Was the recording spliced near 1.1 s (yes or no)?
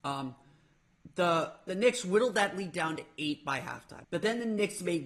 no